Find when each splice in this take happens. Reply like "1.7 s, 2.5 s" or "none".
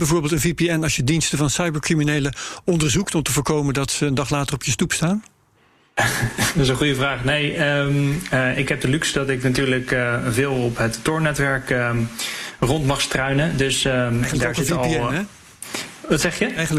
none